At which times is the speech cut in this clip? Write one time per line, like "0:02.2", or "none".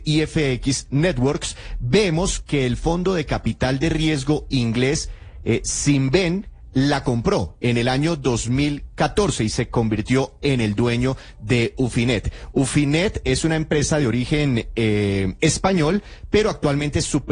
none